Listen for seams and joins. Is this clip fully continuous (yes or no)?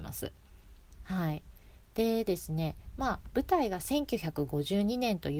no